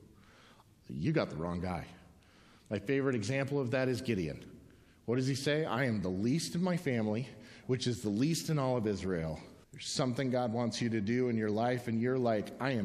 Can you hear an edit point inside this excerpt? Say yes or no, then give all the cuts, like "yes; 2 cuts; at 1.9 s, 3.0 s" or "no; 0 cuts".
yes; 2 cuts; at 7.6 s, 9.6 s